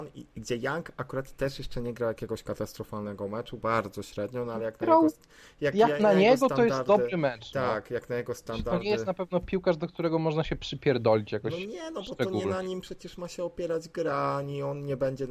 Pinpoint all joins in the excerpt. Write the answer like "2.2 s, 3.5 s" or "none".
3.6 s

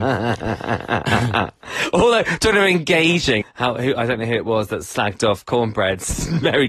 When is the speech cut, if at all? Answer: 3.4 s

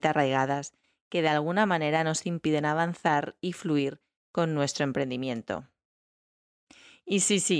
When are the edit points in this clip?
none

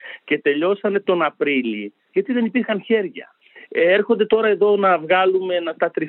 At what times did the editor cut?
none

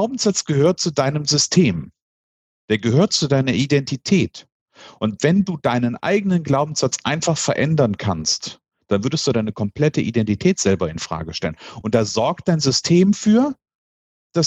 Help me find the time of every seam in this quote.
none

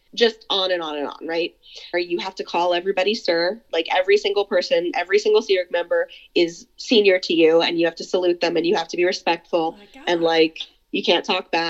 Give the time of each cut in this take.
1.9 s

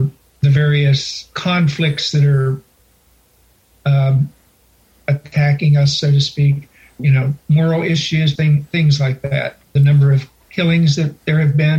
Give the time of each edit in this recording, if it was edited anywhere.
7.0 s, 8.4 s

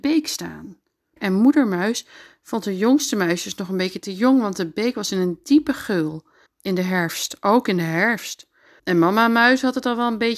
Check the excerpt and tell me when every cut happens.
1.2 s, 6.5 s, 8.8 s

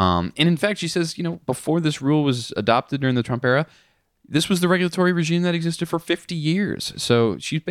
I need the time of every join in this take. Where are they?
none

